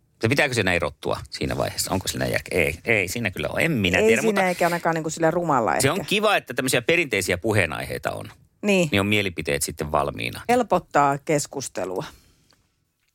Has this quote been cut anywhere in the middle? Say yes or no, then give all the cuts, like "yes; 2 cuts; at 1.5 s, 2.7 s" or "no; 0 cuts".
yes; 1 cut; at 10.5 s